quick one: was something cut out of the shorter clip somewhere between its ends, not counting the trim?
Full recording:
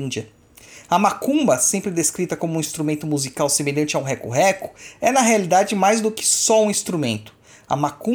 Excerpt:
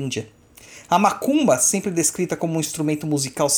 no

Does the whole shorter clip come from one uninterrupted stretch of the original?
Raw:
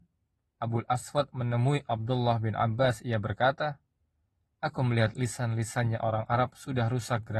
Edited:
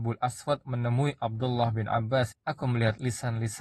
no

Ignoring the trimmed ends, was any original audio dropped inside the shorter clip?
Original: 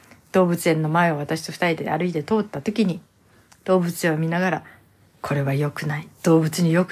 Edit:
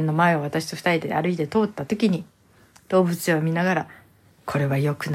no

